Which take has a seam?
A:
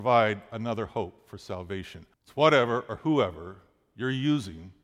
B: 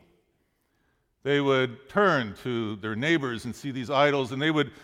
A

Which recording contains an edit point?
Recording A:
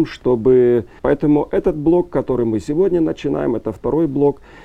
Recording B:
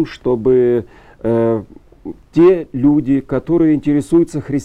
A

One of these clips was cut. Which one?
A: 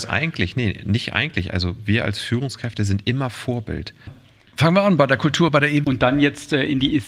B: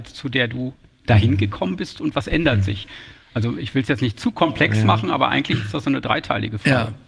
A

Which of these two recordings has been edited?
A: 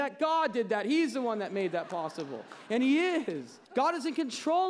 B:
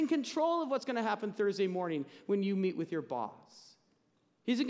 A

